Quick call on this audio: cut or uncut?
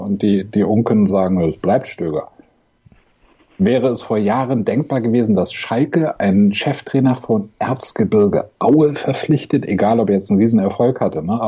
uncut